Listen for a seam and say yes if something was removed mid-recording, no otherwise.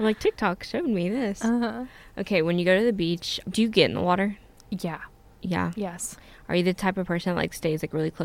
yes